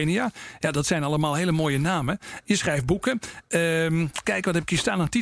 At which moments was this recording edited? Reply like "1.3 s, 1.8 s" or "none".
4.2 s